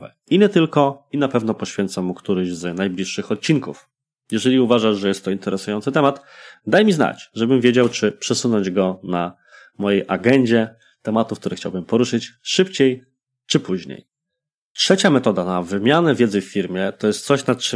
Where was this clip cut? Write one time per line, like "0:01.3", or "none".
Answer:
none

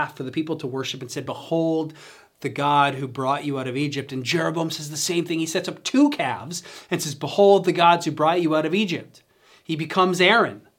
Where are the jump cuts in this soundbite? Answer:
none

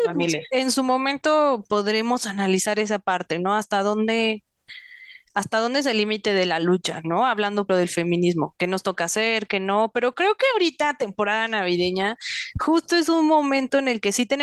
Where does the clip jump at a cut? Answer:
0:07.7

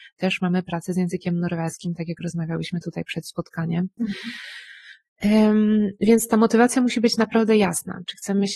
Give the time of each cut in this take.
none

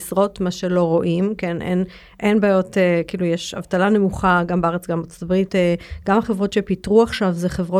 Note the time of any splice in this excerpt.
0:05.5

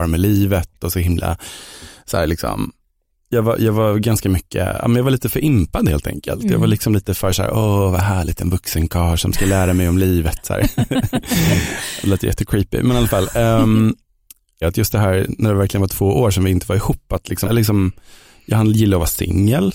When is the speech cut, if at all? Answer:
0:14.6
0:17.4

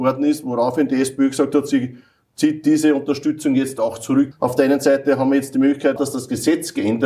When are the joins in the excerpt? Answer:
0:04.3
0:06.0

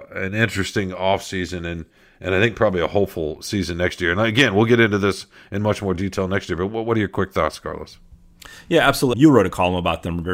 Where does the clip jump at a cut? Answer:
0:09.1

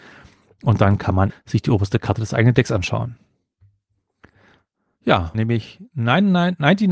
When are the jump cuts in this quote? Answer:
0:01.3
0:05.3

